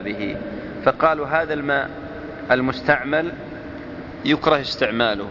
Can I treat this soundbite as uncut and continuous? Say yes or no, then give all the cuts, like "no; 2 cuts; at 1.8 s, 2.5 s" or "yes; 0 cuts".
no; 1 cut; at 4.2 s